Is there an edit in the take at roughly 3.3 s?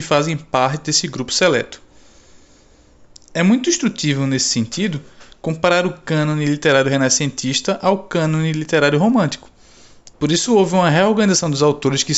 no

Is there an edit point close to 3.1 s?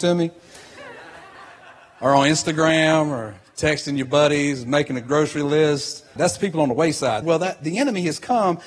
no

